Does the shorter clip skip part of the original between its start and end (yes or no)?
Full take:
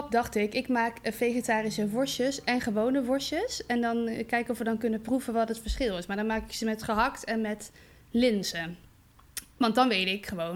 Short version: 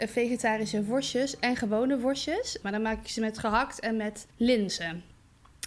yes